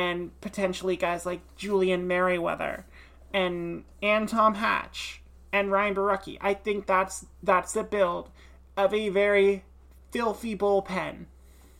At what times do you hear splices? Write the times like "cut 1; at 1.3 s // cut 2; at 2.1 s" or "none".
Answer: none